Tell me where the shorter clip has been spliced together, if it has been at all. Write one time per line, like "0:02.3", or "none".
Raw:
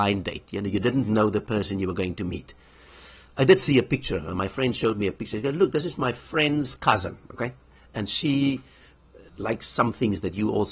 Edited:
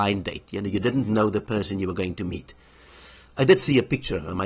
none